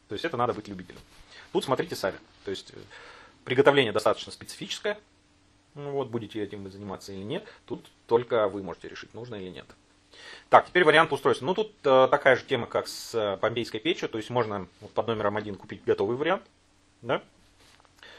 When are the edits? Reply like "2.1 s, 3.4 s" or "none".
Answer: none